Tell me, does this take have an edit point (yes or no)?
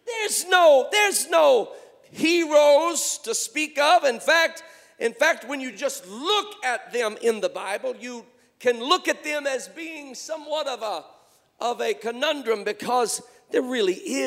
no